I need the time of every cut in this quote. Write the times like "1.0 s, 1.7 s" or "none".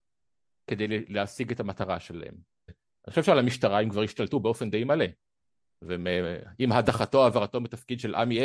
2.7 s